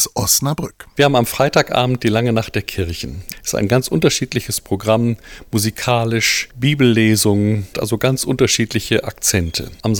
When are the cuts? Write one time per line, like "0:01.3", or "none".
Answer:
0:07.7